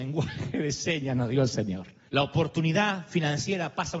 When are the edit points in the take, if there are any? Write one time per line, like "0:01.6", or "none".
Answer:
0:02.1